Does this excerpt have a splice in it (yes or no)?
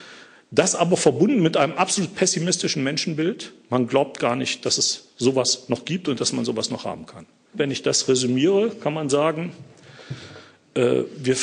yes